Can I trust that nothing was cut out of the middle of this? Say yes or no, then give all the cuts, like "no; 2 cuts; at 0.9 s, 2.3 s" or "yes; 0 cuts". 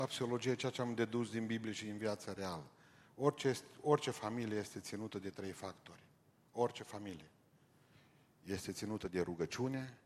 yes; 0 cuts